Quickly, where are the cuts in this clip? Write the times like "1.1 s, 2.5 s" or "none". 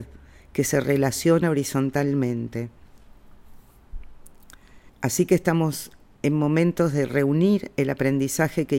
4.9 s